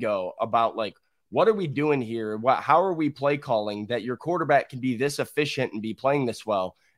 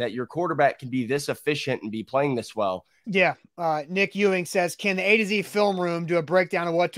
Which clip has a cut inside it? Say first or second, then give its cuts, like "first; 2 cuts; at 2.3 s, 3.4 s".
second; 1 cut; at 3.0 s